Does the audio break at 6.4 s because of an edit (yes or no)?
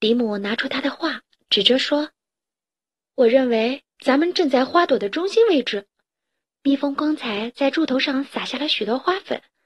yes